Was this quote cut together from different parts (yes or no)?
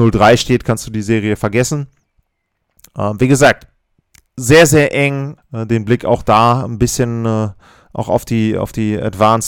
yes